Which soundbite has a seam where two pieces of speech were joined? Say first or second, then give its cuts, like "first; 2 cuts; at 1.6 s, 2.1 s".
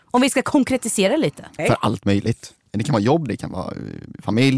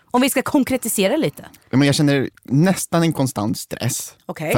first; 2 cuts; at 1.6 s, 3.3 s